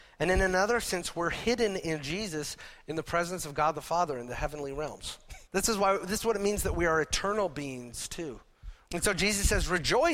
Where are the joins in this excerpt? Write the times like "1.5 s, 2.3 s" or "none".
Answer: 5.5 s, 8.9 s